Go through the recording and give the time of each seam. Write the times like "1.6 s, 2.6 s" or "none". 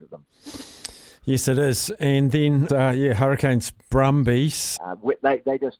2.7 s, 4.8 s